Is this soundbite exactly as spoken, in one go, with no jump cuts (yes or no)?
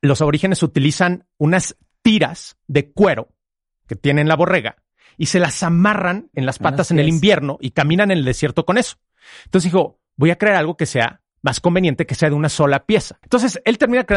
no